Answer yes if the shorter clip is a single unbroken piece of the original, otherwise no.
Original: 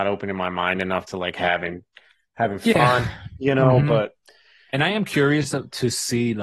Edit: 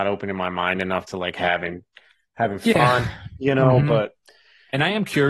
yes